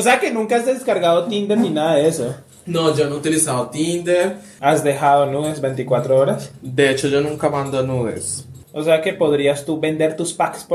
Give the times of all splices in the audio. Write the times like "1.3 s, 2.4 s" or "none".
4.6 s, 8.6 s